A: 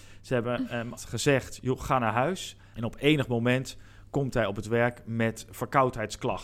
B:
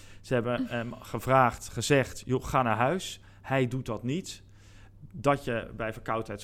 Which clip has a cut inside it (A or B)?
A